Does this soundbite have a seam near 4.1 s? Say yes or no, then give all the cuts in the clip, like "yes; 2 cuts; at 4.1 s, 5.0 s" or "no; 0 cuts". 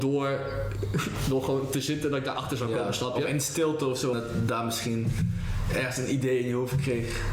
yes; 1 cut; at 4.1 s